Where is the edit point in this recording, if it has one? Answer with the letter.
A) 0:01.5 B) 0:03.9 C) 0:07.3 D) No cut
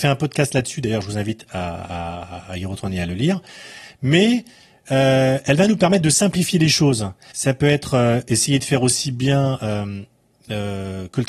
C